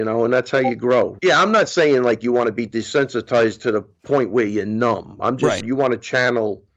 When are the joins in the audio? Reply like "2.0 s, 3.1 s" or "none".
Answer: 1.2 s, 5.6 s